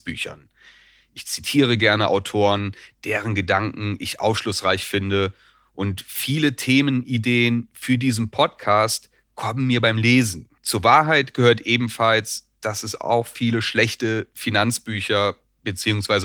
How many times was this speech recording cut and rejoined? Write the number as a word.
one